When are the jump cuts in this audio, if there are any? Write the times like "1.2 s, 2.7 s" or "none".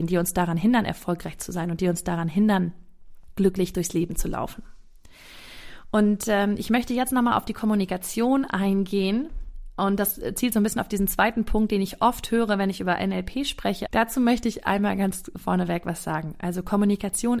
13.9 s